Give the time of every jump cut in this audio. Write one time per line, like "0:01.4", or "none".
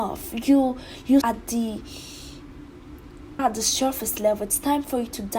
0:01.2
0:03.4